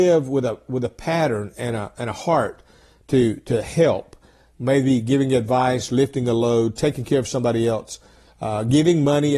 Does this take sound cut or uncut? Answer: uncut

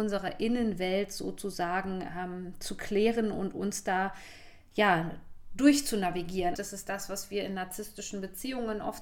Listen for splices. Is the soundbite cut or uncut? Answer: cut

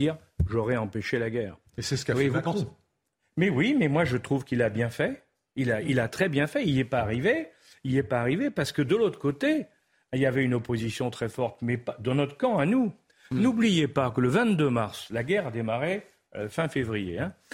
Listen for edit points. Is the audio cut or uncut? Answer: uncut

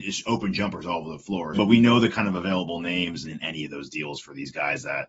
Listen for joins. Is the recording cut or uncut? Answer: cut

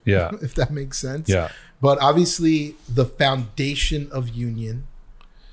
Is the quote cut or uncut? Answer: uncut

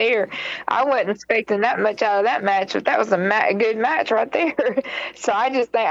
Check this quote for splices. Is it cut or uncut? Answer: uncut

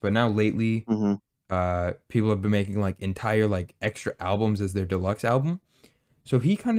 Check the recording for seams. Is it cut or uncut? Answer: uncut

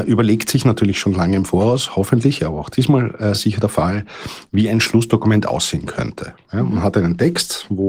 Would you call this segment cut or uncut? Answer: uncut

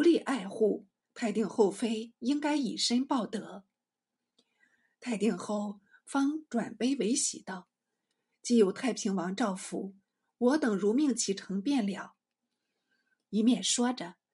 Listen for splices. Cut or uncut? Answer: uncut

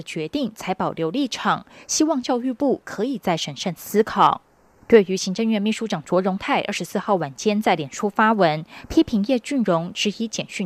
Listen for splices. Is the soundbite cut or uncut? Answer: uncut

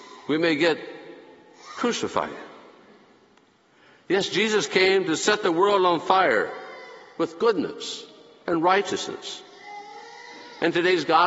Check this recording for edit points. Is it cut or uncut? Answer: uncut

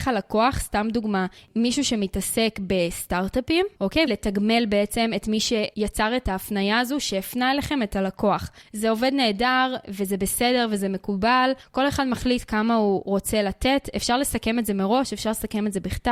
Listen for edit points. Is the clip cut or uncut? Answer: cut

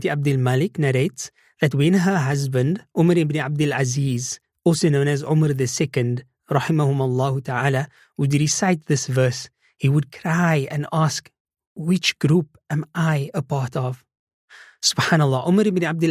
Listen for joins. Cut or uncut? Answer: uncut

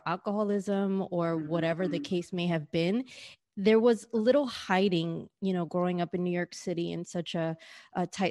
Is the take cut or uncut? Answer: uncut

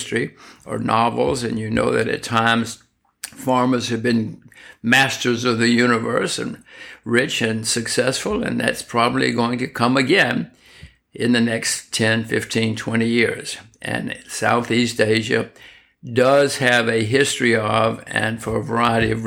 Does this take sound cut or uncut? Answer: uncut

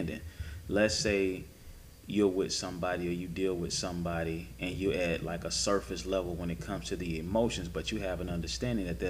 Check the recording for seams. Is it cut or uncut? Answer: uncut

